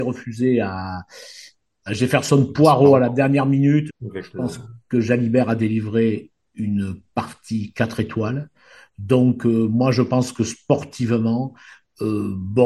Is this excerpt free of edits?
no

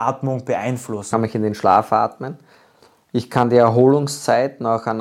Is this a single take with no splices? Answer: no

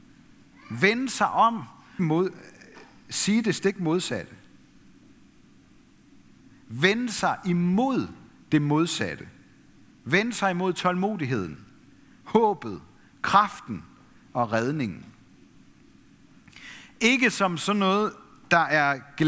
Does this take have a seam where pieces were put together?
yes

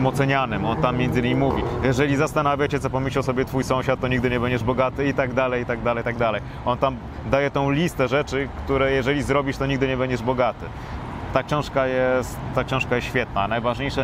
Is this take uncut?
yes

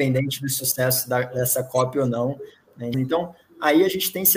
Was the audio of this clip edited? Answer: yes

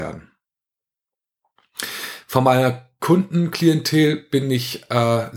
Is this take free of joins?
yes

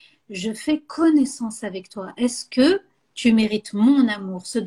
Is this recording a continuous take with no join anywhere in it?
yes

